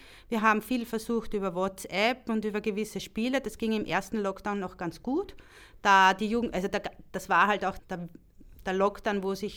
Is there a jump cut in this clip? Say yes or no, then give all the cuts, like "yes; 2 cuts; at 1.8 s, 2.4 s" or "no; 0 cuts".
yes; 1 cut; at 7.8 s